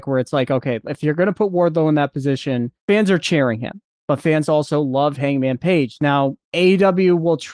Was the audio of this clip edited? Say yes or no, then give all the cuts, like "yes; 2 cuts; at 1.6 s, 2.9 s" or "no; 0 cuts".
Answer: no; 0 cuts